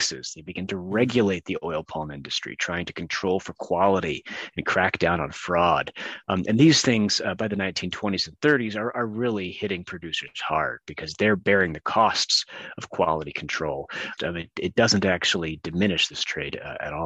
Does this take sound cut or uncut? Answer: cut